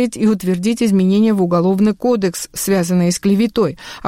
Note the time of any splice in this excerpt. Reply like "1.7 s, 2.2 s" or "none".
none